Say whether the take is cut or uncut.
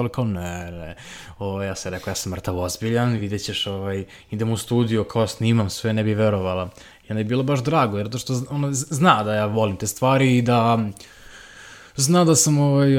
uncut